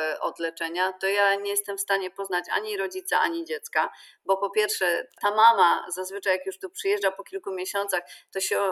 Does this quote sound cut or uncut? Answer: uncut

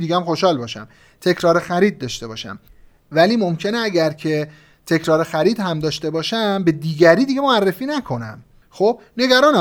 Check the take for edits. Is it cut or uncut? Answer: uncut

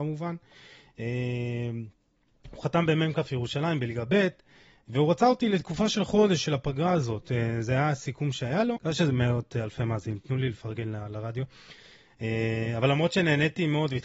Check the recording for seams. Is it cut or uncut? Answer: cut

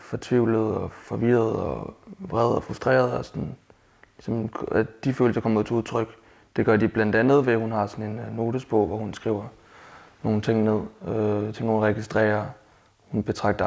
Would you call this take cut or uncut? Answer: uncut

